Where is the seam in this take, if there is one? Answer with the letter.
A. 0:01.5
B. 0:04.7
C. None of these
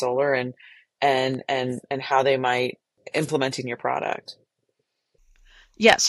C